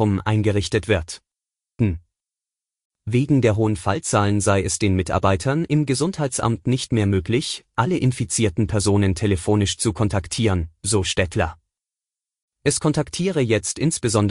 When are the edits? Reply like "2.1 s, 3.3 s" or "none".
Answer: 1.8 s